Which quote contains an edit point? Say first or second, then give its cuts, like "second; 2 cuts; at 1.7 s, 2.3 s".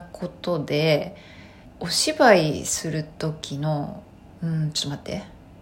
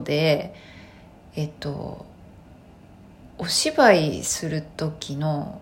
first; 2 cuts; at 1.6 s, 4.3 s